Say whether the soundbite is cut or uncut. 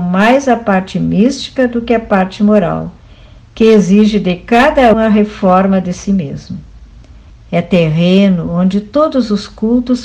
cut